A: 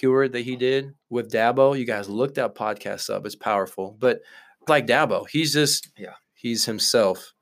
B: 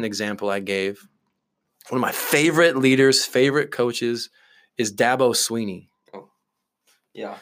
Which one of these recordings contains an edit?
A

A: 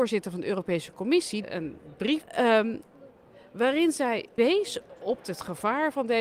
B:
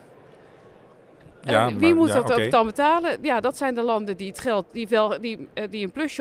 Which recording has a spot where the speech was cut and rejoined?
B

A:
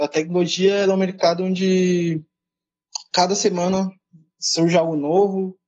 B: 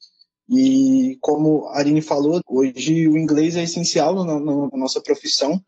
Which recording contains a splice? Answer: B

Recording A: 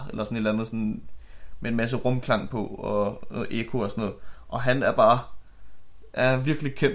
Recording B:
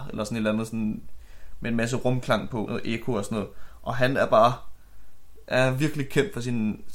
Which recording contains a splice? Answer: B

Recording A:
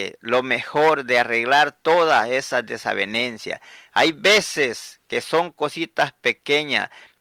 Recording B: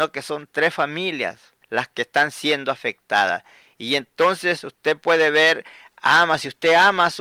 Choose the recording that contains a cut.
B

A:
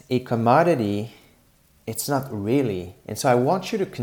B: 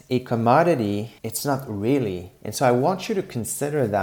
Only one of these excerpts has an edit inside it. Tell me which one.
B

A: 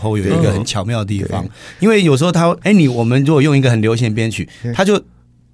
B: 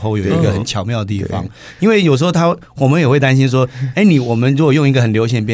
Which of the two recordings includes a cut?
A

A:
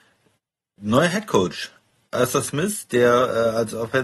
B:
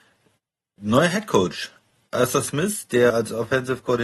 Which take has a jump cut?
B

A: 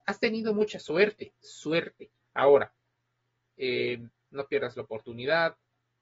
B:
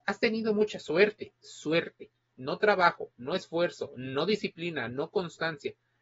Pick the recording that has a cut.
A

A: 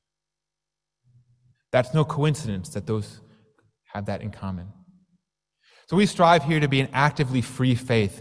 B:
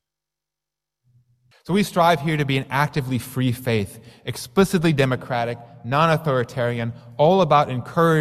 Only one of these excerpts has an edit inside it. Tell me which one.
B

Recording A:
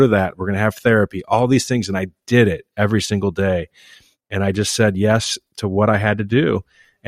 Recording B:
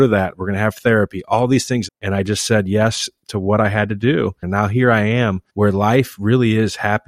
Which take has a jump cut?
B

